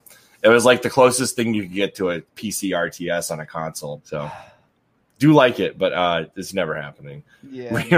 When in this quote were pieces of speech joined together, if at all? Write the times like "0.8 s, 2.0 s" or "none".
4.0 s